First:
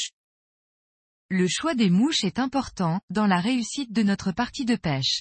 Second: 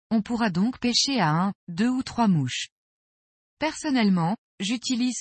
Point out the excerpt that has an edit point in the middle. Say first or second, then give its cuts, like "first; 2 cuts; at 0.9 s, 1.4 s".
first; 1 cut; at 3.0 s